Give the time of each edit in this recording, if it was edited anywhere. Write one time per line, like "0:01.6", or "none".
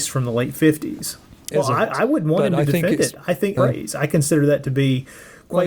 0:01.5
0:03.6

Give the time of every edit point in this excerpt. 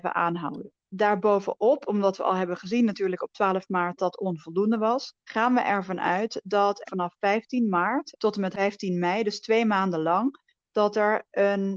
0:04.0
0:06.8

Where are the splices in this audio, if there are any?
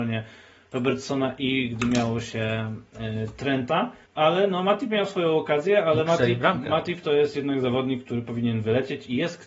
0:04.1

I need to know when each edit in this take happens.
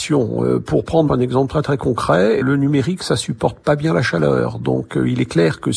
0:02.4

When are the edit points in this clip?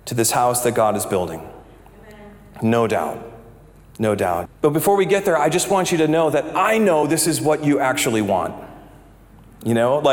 0:04.5

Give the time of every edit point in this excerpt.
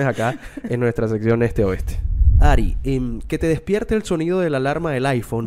none

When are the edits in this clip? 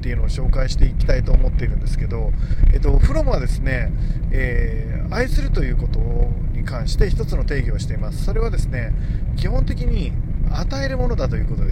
none

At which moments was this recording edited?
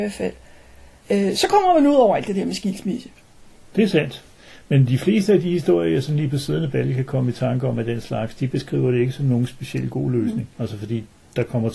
0:01.0
0:10.5

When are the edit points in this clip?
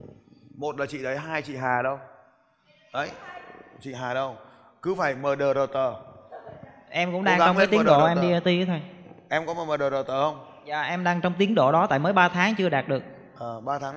none

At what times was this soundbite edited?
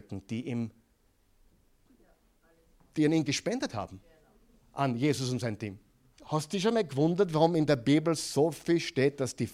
0:06.1

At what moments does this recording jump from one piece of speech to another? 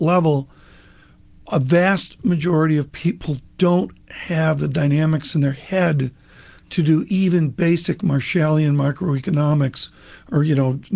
none

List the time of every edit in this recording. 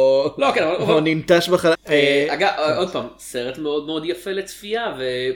0:01.7

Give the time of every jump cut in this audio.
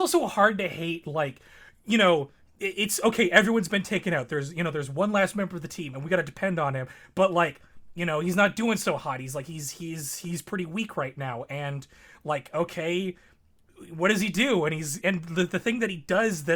0:15.0

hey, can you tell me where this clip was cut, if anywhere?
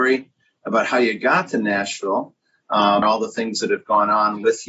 0:03.0

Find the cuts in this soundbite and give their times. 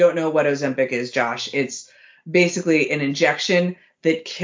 none

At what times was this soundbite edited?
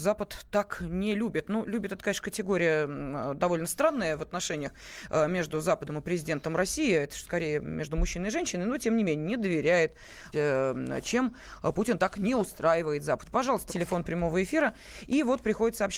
0:10.3
0:13.7

